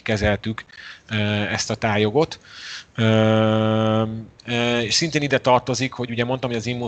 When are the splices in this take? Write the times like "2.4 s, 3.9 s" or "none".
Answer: 4.4 s